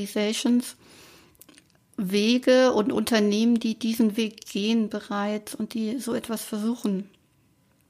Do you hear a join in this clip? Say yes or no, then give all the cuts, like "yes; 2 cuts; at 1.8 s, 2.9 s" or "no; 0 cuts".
no; 0 cuts